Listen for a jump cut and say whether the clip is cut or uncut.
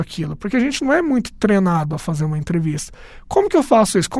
uncut